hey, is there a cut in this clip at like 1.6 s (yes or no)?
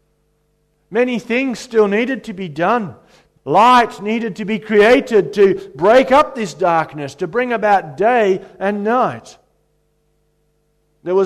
no